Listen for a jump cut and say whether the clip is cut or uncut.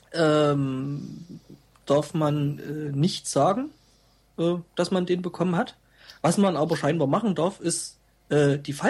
uncut